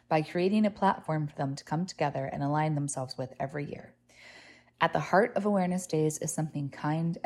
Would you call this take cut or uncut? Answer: uncut